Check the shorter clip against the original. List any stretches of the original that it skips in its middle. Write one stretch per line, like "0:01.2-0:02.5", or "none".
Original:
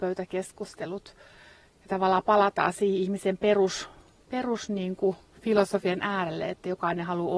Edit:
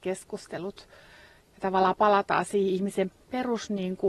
0:03.4-0:04.1